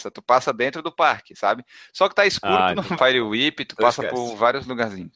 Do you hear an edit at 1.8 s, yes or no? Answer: no